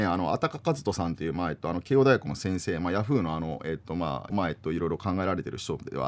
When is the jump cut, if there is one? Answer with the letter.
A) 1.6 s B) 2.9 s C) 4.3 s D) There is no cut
C